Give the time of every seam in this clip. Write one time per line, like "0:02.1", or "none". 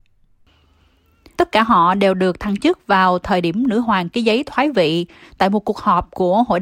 0:01.4

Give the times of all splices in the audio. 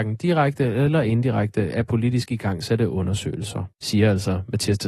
0:03.7

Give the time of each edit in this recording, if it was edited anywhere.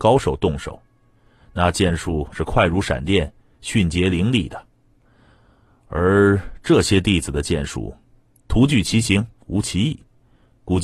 none

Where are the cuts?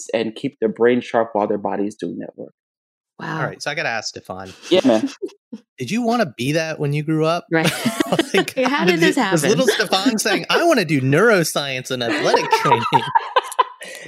0:08.6

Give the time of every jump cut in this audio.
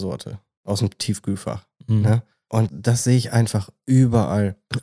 0:02.7

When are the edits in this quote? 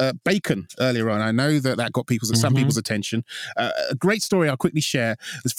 none

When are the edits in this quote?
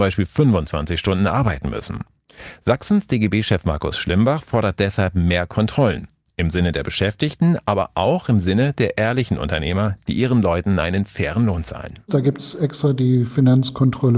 none

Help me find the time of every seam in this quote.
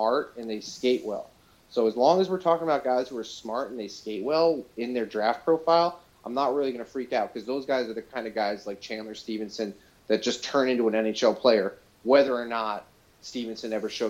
none

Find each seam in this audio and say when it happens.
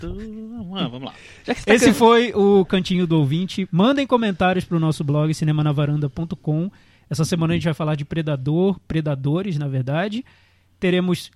none

